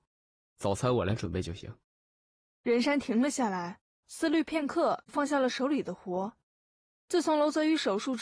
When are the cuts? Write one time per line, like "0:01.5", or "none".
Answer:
0:04.0
0:05.1